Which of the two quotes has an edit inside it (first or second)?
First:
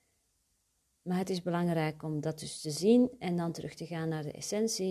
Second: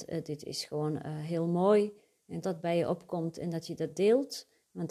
second